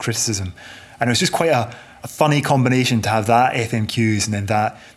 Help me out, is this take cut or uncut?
uncut